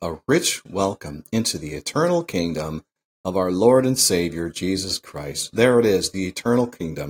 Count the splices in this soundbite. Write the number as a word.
zero